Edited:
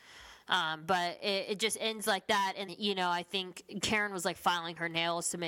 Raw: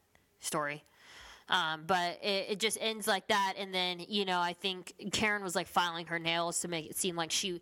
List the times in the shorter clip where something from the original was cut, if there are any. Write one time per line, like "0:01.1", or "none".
0:02.7